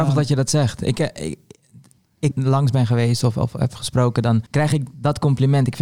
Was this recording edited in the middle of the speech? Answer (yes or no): yes